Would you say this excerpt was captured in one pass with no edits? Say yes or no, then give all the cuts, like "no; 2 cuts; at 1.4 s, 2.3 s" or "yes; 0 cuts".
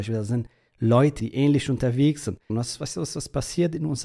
no; 2 cuts; at 1.2 s, 2.5 s